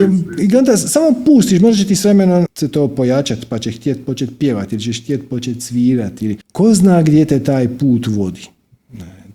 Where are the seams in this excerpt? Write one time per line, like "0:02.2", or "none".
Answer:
0:02.5
0:06.4

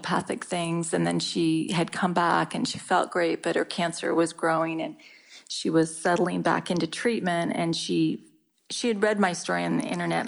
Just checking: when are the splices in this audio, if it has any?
none

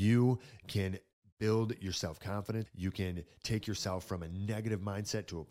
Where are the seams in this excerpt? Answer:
0:02.7

